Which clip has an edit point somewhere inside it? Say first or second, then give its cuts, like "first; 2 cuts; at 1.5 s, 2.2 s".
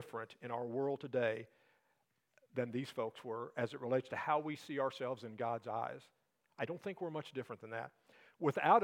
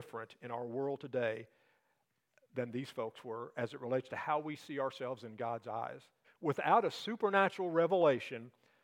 second; 1 cut; at 6.2 s